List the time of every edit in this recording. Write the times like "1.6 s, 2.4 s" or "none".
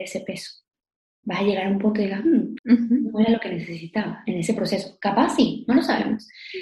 2.6 s